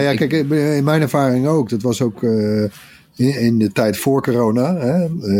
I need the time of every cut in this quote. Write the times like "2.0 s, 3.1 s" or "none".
none